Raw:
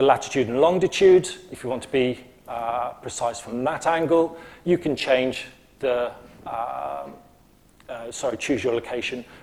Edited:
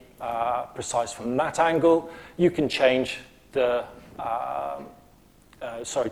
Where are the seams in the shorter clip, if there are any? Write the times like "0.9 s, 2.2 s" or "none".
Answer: none